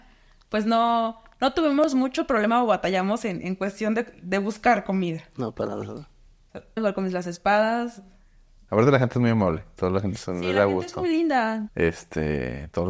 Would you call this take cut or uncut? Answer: cut